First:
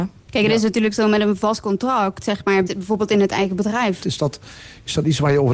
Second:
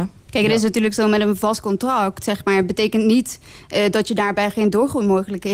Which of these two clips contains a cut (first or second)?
first